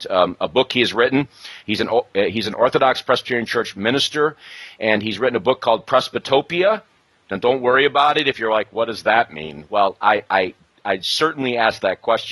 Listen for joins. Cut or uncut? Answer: uncut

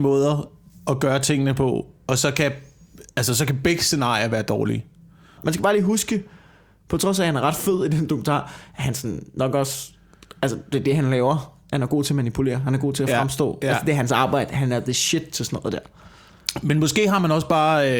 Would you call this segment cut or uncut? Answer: cut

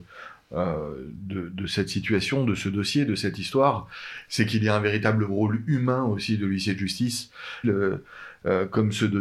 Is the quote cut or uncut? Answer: cut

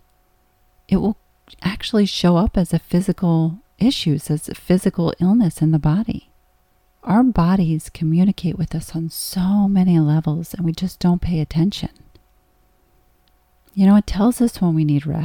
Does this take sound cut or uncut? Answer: cut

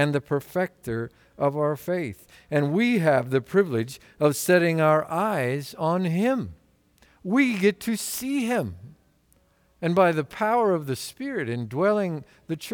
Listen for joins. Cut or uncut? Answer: uncut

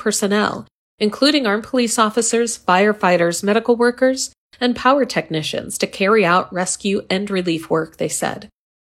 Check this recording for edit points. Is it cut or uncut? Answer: cut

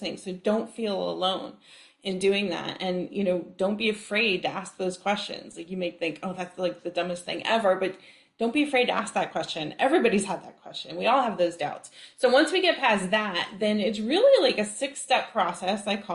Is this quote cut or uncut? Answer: uncut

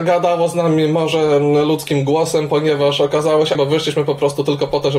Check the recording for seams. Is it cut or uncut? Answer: cut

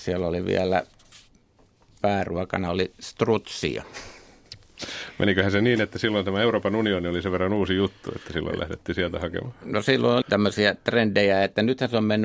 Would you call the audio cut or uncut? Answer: cut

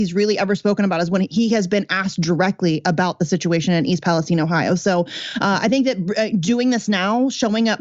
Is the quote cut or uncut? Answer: uncut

